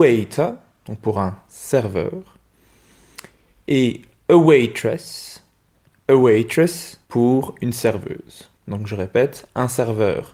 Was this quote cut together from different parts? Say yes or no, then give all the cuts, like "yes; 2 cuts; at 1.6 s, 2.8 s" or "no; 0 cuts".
yes; 2 cuts; at 7.0 s, 8.6 s